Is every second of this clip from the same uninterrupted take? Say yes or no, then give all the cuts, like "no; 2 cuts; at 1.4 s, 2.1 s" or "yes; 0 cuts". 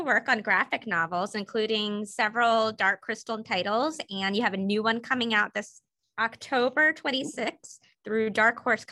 yes; 0 cuts